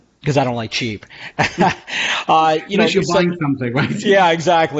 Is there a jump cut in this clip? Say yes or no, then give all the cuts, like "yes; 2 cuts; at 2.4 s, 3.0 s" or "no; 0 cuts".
no; 0 cuts